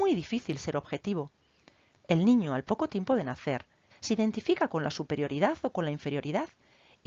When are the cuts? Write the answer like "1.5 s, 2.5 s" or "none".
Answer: 1.9 s, 3.9 s